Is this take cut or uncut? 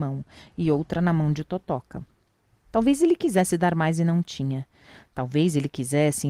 uncut